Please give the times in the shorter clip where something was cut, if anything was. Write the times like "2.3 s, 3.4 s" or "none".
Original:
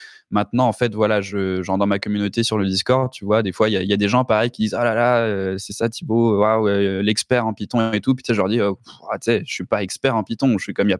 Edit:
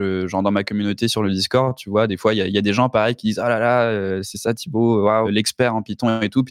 5.2 s